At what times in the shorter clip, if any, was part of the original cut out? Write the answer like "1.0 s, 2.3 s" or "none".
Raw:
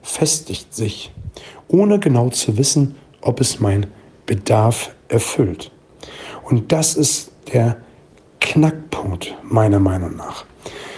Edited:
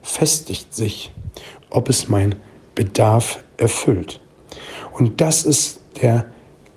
1.6 s